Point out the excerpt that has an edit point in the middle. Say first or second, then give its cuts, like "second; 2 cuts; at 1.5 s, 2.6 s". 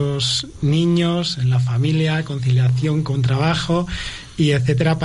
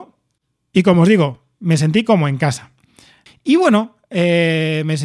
second; 1 cut; at 3.3 s